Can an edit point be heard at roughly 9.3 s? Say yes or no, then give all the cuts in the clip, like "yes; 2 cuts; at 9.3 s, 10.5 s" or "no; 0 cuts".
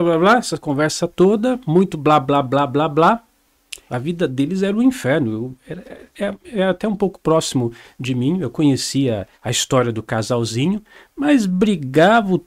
yes; 2 cuts; at 3.9 s, 9.3 s